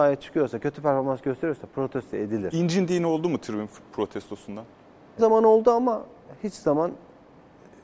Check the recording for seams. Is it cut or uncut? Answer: cut